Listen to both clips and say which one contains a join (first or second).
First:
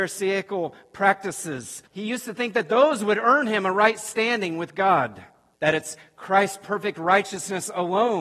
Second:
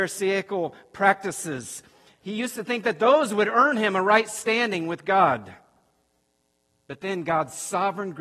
first